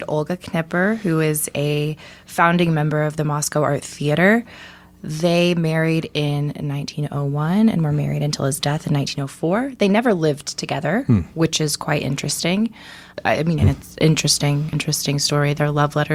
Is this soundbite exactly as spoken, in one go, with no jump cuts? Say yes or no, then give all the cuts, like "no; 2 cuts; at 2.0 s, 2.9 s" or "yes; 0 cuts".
no; 2 cuts; at 13.6 s, 14.7 s